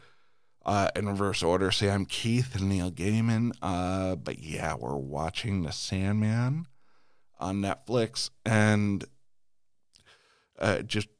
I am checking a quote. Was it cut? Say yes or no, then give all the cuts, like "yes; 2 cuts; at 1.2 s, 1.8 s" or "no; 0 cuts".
no; 0 cuts